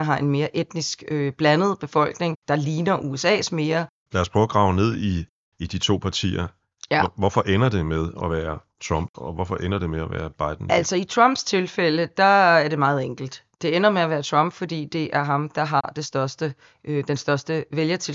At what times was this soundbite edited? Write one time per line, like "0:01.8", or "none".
0:04.0